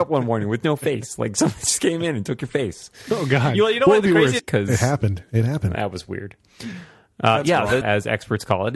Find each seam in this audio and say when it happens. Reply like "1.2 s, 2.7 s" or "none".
4.4 s, 7.8 s